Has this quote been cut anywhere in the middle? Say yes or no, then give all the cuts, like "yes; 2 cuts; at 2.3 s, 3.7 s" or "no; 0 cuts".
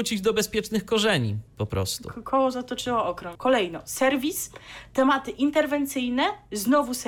yes; 2 cuts; at 1.5 s, 3.4 s